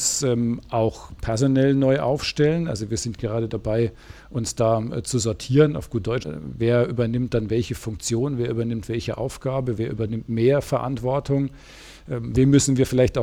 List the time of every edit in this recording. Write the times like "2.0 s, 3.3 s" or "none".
6.2 s